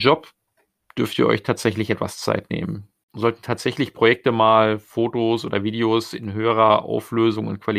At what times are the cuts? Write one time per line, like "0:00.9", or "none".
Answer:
0:03.0